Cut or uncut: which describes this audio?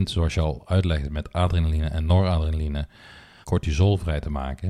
cut